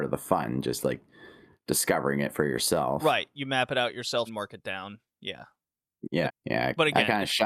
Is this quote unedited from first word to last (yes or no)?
no